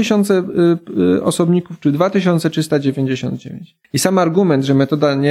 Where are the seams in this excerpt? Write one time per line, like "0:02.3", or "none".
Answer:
0:03.8